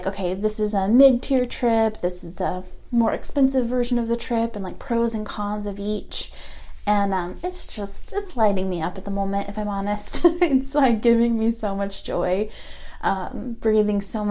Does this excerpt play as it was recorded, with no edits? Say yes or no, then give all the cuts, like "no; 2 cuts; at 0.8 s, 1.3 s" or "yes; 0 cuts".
yes; 0 cuts